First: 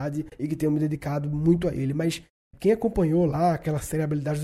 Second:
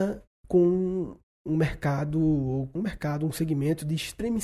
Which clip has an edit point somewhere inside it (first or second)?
second